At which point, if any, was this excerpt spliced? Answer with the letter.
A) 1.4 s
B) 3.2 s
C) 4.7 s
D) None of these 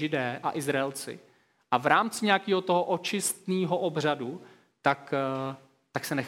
D